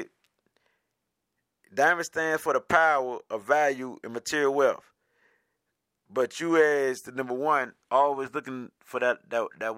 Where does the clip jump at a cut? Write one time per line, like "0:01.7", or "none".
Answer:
none

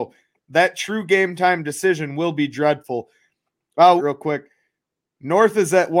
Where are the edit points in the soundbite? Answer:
0:04.0

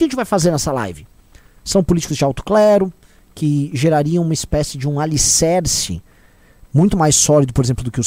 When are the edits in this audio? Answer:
0:01.5

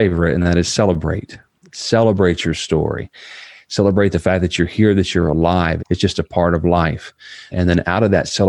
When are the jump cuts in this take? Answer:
0:05.8
0:07.5

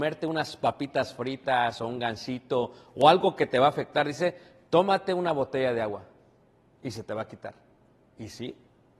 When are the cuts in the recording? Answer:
none

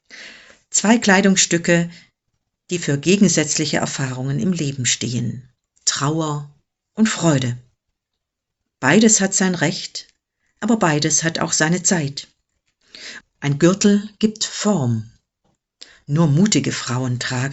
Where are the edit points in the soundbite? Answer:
0:08.6
0:13.2

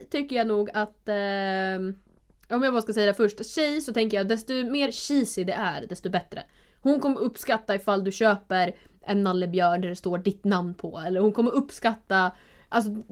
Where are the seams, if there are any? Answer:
none

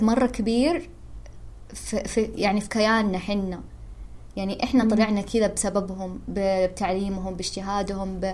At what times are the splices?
none

